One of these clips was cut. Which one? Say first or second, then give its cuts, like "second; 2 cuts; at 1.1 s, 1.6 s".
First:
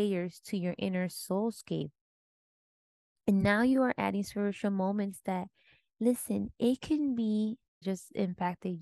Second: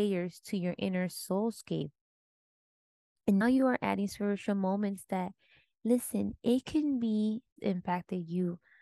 second; 2 cuts; at 3.4 s, 7.6 s